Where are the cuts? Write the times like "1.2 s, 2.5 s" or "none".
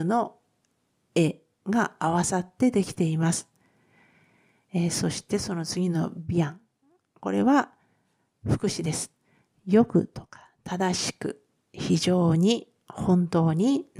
none